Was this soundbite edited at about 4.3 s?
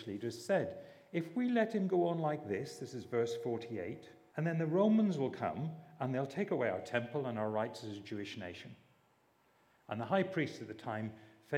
yes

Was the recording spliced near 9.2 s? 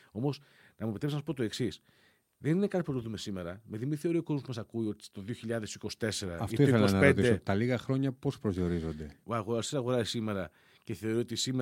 yes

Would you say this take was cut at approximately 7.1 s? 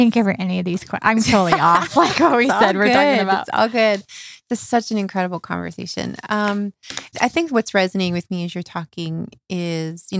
yes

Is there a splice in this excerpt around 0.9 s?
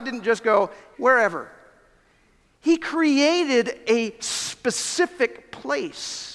yes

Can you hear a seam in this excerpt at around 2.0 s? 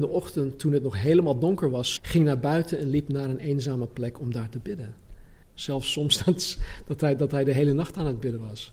yes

